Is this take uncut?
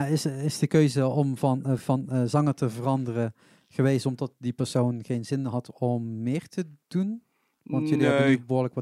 yes; 0 cuts

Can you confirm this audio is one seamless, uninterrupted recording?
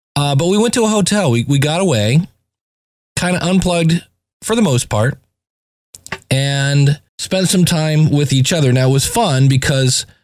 no; 1 cut; at 7.1 s

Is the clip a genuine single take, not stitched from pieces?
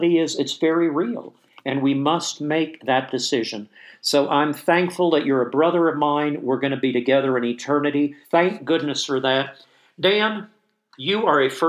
no; 1 cut; at 8.2 s

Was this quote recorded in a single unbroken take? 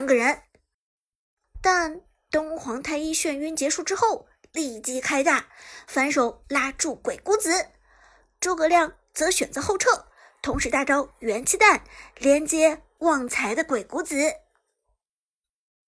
yes; 0 cuts

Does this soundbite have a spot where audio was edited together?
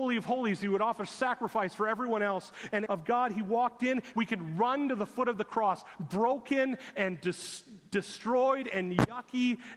yes; 2 cuts; at 2.9 s, 4.1 s

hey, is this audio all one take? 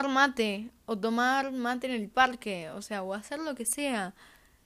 yes; 0 cuts

